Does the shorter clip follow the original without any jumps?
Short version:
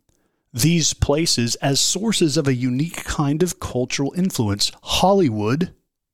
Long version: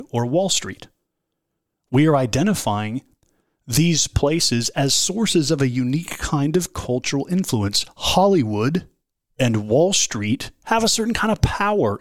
yes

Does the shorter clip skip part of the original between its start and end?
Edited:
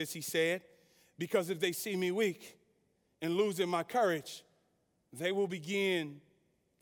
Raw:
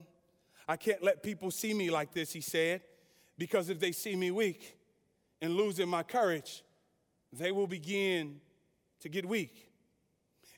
no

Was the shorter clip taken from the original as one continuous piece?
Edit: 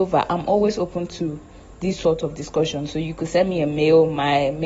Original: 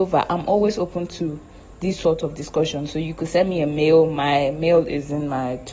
yes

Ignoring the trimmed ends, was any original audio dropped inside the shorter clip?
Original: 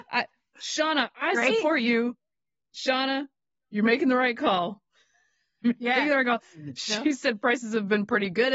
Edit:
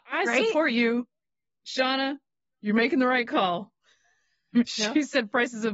yes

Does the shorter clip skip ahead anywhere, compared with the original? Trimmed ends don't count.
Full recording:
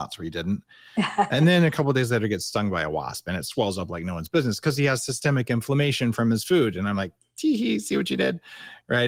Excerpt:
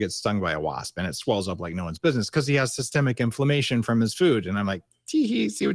no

